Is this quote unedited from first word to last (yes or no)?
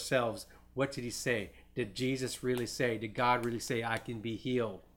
yes